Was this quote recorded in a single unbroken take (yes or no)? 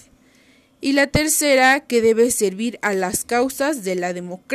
yes